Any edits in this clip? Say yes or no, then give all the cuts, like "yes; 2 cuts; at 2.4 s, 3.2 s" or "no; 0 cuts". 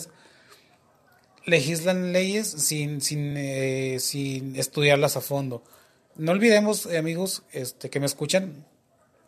no; 0 cuts